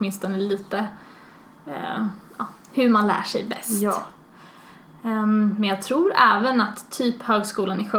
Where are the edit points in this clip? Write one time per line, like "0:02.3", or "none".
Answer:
none